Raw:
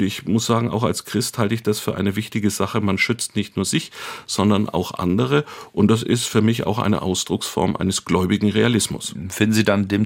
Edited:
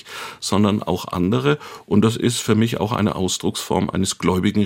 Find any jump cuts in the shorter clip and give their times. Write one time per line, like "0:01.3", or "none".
none